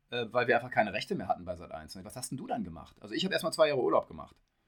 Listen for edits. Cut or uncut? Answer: cut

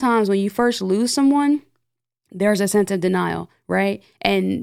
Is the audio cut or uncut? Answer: uncut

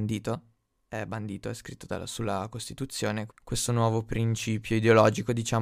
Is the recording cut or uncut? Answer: cut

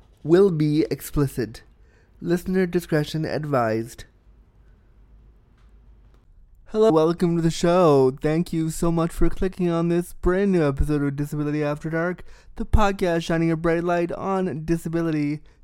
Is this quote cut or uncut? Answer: cut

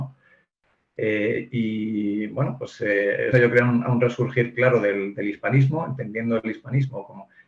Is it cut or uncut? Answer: cut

